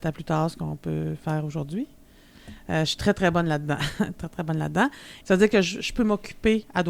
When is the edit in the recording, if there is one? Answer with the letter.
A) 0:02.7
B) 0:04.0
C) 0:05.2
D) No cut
C